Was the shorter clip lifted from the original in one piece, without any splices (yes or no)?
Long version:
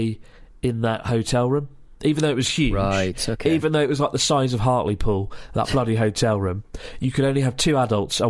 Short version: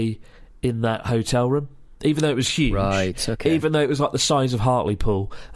yes